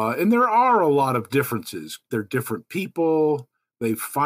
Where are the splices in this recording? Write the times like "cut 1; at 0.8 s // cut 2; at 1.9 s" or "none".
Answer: cut 1; at 2.1 s